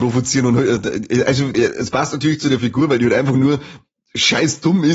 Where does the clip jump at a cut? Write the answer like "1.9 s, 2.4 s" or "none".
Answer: 1.5 s